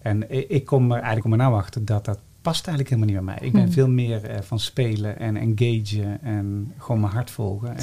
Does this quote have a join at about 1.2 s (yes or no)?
yes